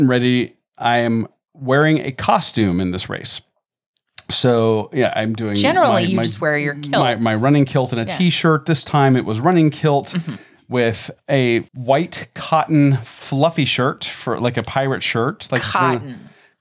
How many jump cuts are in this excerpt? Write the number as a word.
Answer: one